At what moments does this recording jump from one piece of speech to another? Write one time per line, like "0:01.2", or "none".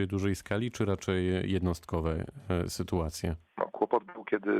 0:03.5